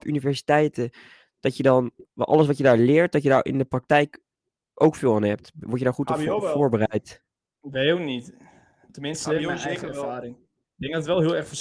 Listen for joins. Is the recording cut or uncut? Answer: uncut